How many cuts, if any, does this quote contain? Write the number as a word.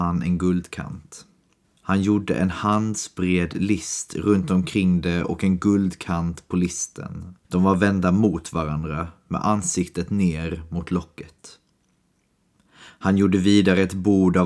one